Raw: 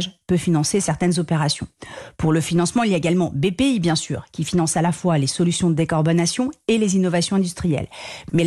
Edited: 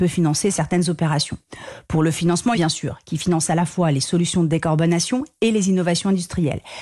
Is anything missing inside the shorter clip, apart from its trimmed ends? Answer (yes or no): yes